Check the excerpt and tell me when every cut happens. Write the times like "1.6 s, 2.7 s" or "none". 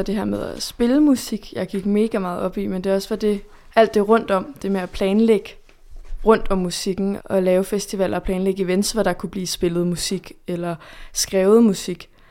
7.2 s